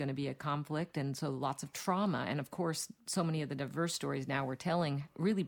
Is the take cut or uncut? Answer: uncut